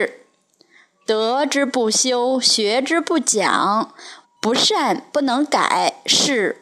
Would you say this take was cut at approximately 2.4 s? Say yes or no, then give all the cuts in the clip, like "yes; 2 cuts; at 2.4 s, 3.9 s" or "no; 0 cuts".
no; 1 cut; at 4.2 s